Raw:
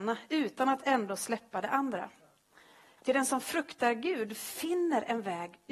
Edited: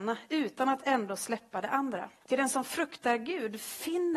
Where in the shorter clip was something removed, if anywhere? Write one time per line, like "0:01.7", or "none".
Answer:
0:02.2